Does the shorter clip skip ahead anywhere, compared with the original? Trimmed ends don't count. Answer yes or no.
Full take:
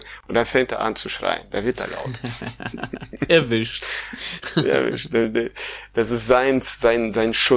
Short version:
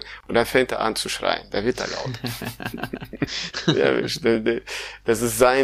yes